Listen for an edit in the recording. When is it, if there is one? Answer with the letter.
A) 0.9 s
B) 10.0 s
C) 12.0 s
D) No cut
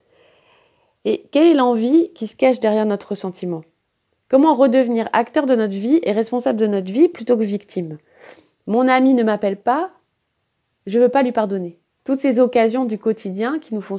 C